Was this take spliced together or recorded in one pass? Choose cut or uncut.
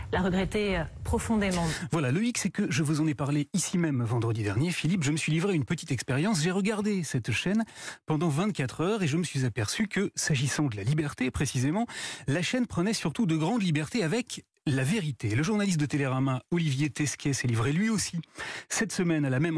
uncut